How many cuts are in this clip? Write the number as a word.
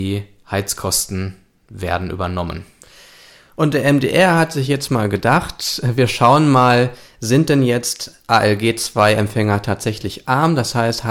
zero